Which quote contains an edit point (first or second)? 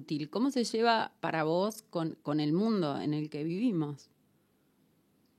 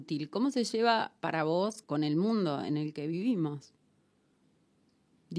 second